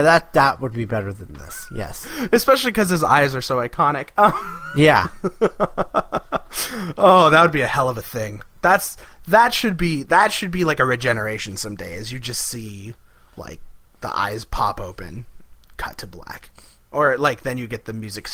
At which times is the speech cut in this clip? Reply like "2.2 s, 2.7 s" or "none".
none